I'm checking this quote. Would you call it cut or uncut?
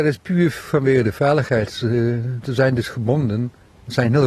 uncut